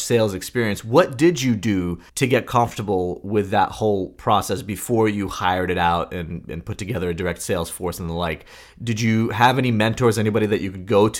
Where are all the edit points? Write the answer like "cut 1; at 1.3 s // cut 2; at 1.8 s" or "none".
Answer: cut 1; at 2.1 s

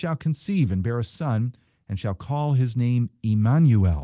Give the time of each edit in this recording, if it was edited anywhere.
none

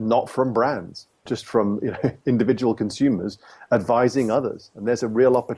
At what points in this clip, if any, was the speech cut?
none

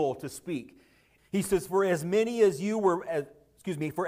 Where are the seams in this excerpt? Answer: cut 1; at 1.2 s

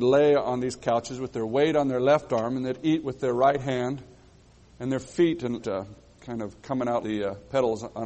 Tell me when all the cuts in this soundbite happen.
cut 1; at 5.6 s // cut 2; at 7.0 s

